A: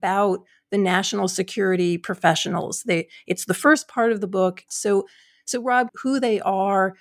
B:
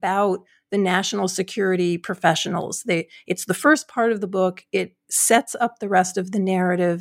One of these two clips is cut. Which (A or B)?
A